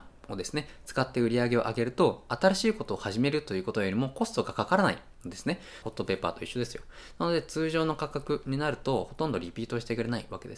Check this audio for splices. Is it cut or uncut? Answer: cut